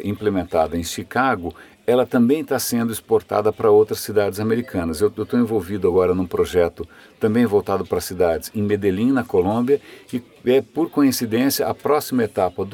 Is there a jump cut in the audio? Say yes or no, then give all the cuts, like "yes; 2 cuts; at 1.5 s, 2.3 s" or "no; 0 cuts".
no; 0 cuts